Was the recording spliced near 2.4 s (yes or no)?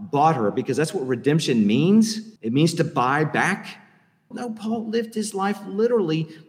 yes